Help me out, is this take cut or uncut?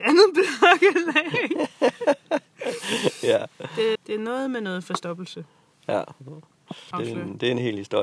cut